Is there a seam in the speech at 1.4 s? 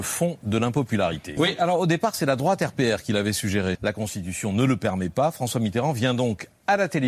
yes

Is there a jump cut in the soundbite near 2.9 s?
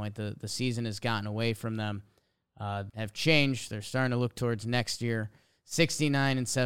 yes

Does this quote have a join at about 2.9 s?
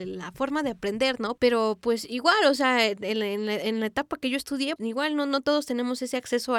no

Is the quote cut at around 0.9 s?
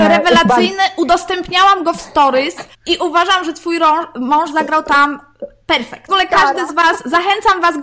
no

